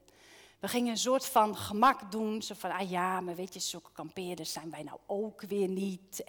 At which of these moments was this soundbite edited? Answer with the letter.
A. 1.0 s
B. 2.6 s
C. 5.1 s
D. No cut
D